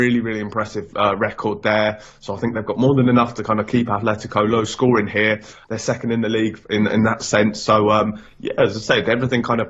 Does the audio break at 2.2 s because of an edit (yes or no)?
no